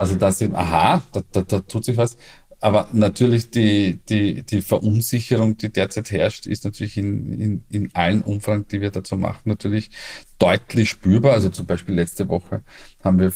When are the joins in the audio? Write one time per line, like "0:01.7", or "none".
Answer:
none